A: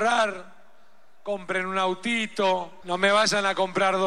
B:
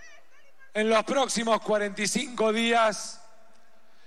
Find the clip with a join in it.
A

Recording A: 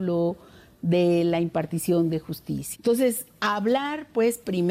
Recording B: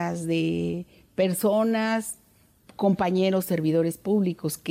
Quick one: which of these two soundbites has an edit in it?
A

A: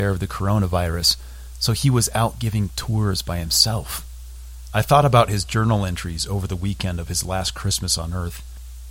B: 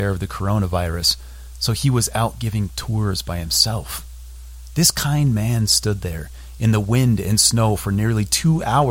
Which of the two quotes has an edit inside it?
A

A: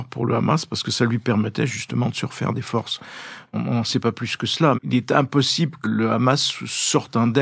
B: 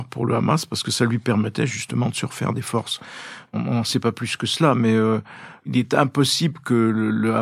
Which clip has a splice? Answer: A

